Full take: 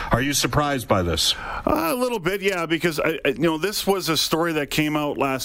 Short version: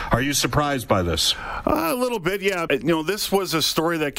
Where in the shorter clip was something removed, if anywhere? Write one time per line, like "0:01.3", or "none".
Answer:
0:02.7